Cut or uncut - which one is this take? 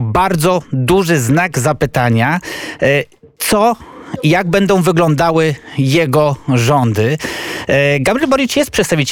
uncut